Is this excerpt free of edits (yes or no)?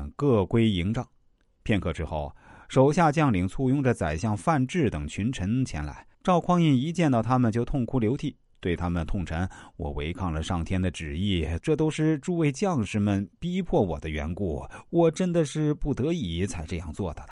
no